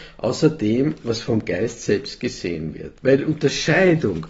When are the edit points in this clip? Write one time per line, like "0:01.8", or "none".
0:03.0

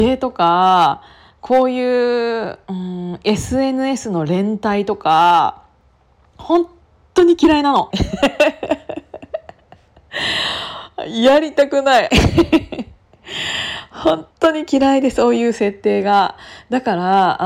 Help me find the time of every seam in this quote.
0:07.9
0:12.1
0:14.3

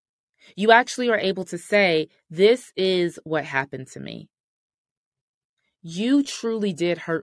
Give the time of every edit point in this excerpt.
none

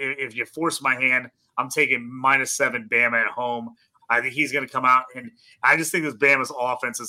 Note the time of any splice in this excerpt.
0:04.0

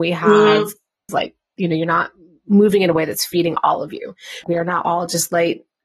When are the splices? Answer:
0:01.1
0:04.4

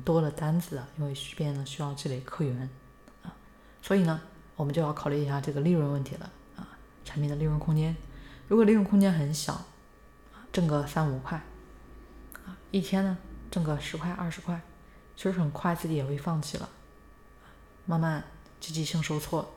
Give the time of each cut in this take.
0:04.5
0:07.0
0:10.5

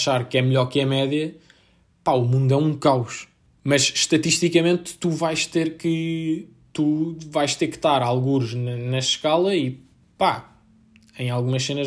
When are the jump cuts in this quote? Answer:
0:03.5

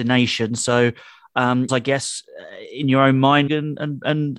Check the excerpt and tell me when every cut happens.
0:01.7
0:03.5

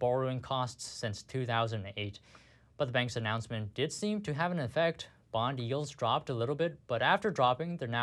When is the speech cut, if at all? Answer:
none

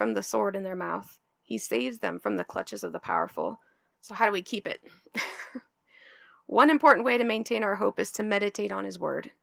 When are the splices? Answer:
0:03.9

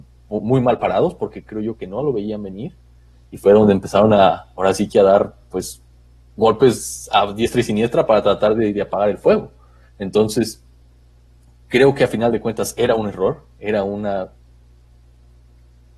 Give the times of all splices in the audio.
none

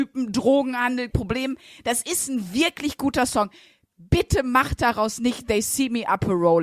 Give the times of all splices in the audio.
0:01.1

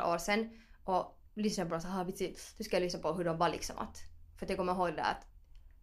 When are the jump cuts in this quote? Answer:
0:01.3

